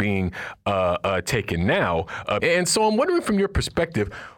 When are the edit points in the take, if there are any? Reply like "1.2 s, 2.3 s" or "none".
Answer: 2.4 s